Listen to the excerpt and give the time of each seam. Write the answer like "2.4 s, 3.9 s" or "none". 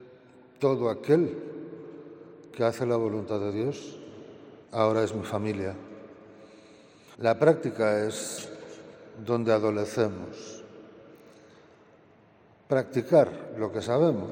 4.6 s, 7.1 s